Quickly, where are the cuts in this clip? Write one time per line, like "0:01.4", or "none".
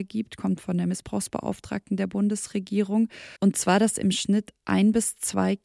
0:03.4